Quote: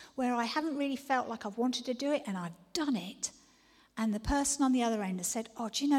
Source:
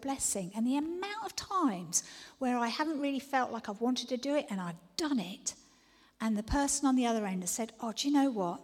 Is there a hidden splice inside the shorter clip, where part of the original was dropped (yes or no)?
no